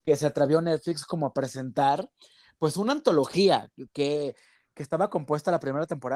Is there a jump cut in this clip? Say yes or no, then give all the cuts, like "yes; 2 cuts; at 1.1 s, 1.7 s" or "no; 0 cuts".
no; 0 cuts